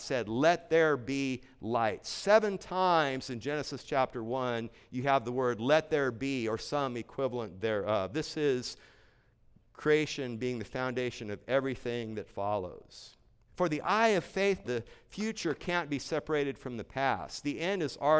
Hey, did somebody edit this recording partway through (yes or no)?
yes